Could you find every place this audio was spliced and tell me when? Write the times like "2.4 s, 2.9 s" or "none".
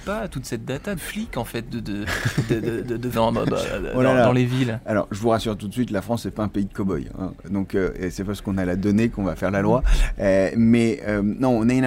1.0 s, 3.1 s

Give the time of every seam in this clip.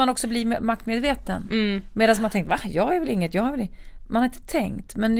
none

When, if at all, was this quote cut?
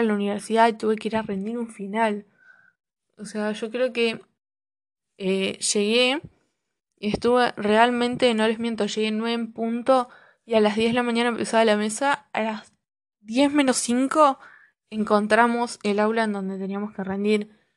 none

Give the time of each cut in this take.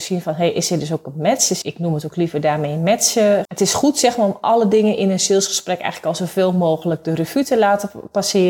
1.6 s, 3.5 s

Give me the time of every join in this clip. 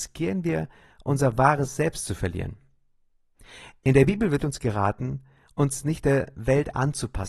none

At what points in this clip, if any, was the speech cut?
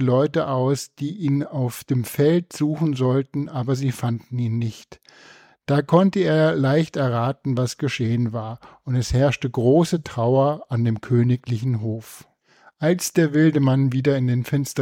none

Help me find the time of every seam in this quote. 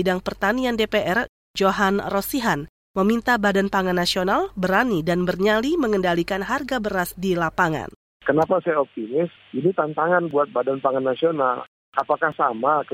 none

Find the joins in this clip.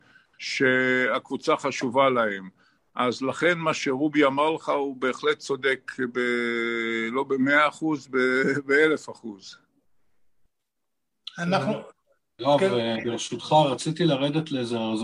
none

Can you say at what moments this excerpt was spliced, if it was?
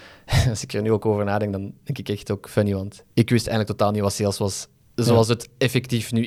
none

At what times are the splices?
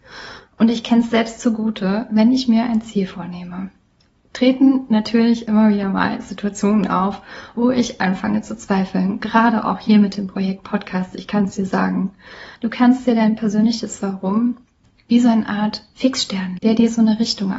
12.5 s, 16.6 s

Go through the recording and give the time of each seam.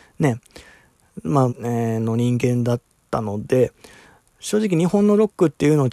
1.5 s

